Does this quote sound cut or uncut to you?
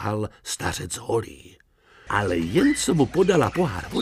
cut